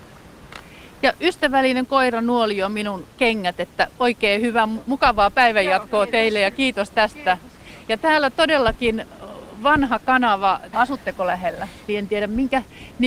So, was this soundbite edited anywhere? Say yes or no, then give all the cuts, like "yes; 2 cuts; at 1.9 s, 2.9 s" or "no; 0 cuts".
yes; 2 cuts; at 10.7 s, 11.9 s